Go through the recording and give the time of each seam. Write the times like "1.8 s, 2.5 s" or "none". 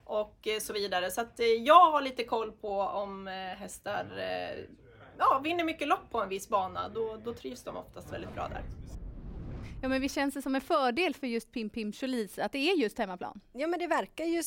none